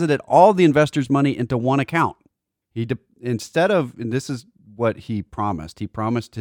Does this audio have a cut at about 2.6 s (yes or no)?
yes